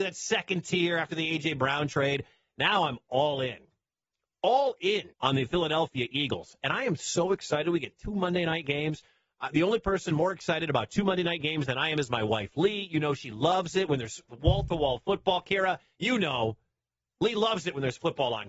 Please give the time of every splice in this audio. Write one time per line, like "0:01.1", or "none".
0:05.1

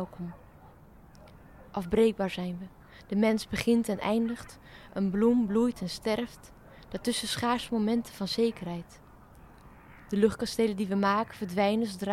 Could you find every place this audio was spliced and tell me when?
none

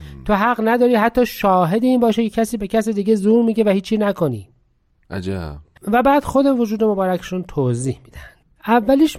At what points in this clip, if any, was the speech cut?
0:05.8

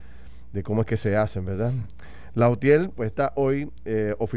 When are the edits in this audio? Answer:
0:03.0

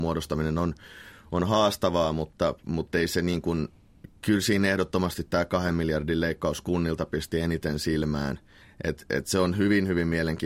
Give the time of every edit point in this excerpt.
0:08.6

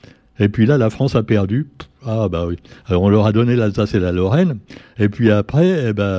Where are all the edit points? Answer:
none

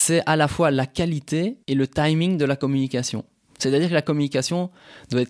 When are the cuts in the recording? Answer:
0:01.6

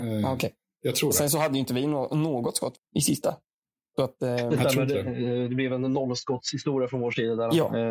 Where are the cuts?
0:02.8

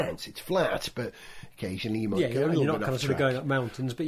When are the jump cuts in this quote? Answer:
none

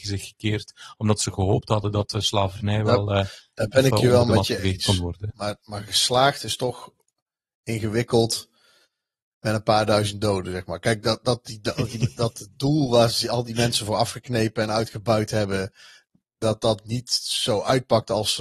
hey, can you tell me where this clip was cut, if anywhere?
none

